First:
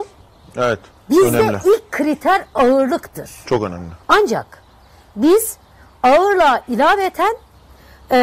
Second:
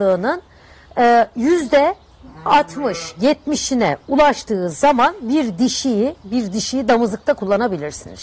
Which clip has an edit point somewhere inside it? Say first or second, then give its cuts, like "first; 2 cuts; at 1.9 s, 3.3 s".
first; 2 cuts; at 1.0 s, 4.0 s